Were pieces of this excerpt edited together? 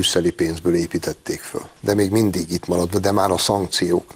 yes; 1 cut; at 1.8 s

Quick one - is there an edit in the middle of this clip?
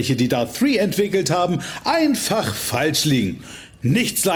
no; 0 cuts

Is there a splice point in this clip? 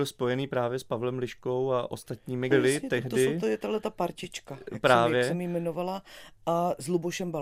yes; 1 cut; at 2.5 s

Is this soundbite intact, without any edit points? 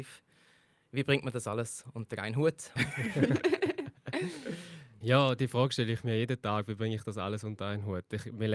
no; 2 cuts; at 2.8 s, 5.0 s

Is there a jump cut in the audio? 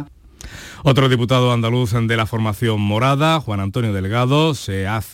no; 0 cuts

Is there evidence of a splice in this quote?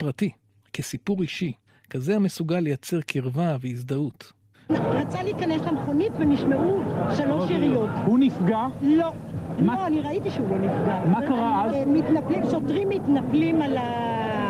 yes; 1 cut; at 4.7 s

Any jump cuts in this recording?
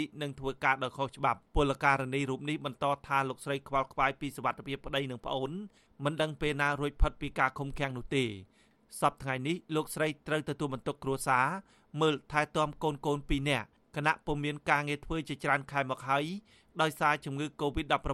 yes; 1 cut; at 1.5 s

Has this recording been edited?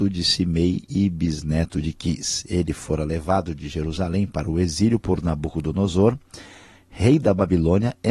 no; 0 cuts

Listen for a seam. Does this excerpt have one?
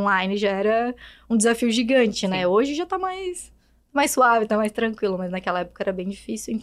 no; 0 cuts

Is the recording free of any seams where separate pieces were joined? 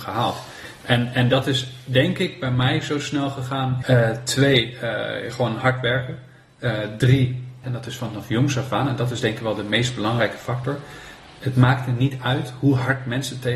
no; 2 cuts; at 3.8 s, 7.6 s

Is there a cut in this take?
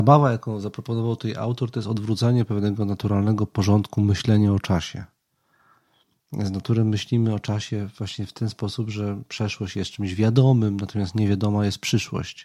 no; 0 cuts

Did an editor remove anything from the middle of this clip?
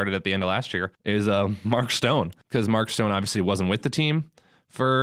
yes; 2 cuts; at 1.0 s, 2.4 s

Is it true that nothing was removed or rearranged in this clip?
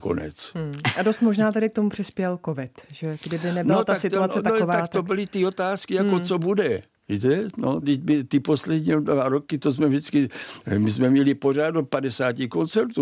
no; 1 cut; at 7.8 s

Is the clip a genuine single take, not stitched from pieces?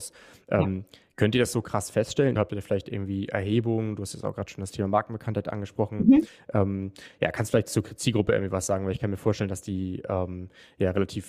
no; 1 cut; at 2.4 s

